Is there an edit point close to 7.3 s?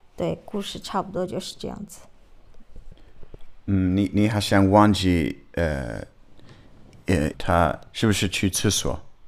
yes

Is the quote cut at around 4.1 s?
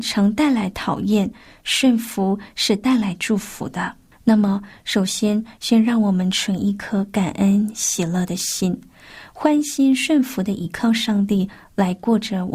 yes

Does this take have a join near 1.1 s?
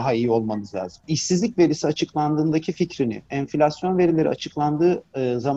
yes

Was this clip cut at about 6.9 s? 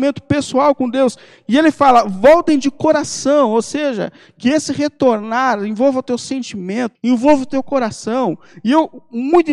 yes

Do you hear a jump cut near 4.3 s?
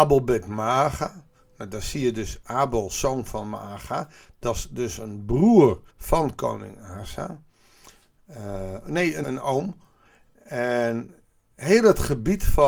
no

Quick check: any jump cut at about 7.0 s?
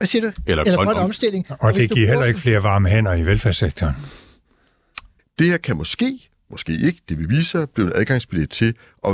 no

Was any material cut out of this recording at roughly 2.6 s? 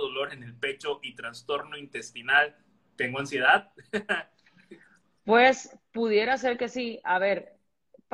no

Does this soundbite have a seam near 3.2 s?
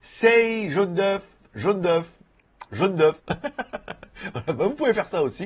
yes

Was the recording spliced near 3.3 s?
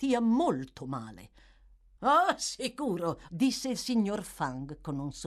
yes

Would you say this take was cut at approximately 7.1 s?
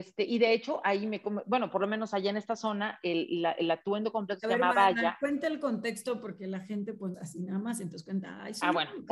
yes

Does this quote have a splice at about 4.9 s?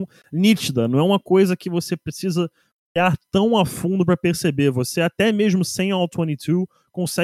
no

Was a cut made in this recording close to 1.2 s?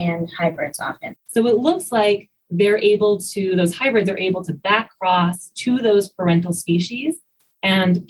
yes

